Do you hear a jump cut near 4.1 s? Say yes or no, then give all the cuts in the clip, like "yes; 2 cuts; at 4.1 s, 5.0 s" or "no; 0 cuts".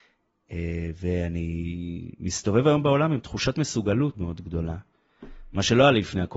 yes; 1 cut; at 4.1 s